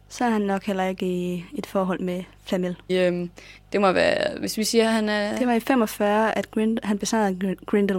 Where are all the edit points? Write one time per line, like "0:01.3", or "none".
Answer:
0:02.9